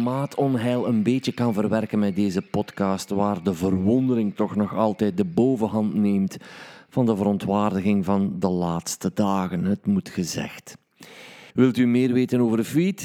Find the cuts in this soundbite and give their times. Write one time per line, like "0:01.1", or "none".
0:11.5